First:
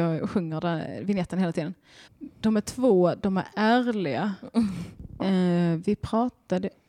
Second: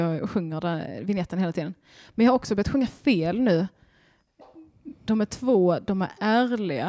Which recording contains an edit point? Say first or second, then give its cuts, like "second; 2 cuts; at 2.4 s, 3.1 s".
first; 2 cuts; at 2.1 s, 5.2 s